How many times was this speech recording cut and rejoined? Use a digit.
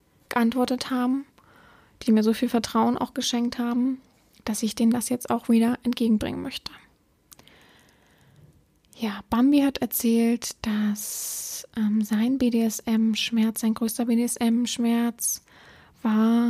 0